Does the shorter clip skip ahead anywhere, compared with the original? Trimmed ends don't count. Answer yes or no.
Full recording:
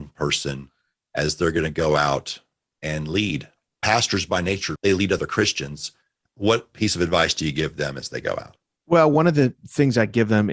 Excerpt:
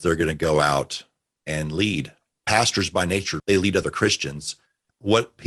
no